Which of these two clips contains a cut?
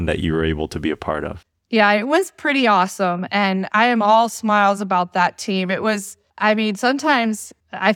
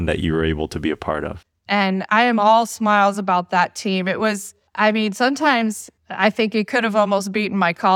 second; 1 cut; at 1.7 s

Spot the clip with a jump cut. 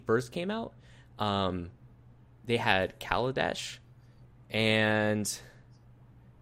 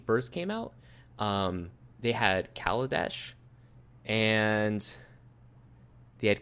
second; 1 cut; at 1.9 s

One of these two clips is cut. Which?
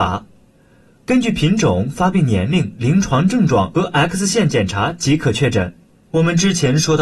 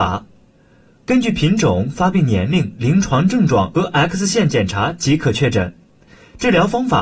first; 1 cut; at 5.9 s

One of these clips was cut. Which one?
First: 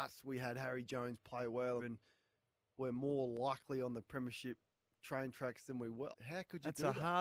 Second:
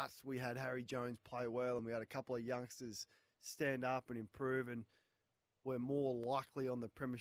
first; 2 cuts; at 1.8 s, 6.1 s

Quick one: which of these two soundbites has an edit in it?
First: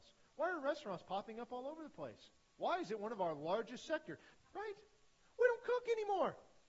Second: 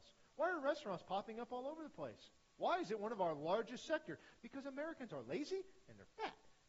first; 1 cut; at 4.4 s

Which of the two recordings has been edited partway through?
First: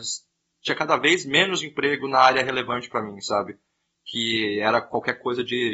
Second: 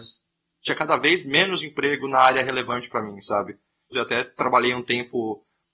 second; 1 cut; at 3.9 s

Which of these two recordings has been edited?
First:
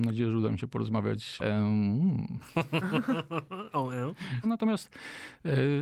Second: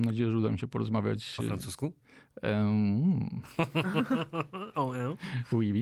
first; 2 cuts; at 1.4 s, 4.4 s

